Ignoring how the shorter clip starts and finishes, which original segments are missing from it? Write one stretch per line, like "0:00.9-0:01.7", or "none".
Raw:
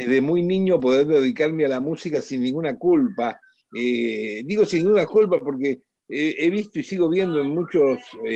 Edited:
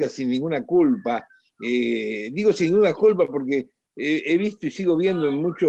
none